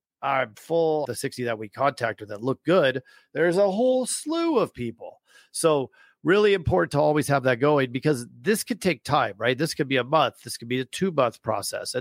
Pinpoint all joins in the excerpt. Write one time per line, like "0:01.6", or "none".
0:01.1

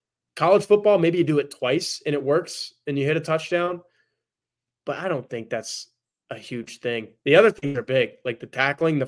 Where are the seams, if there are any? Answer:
none

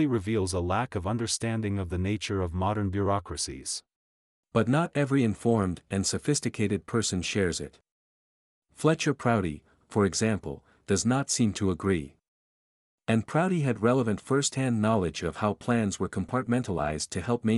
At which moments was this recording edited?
0:04.3
0:09.8

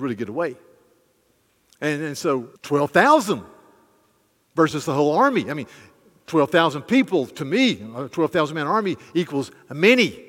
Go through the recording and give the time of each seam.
0:02.6

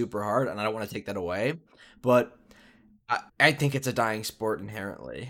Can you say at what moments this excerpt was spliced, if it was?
0:03.3

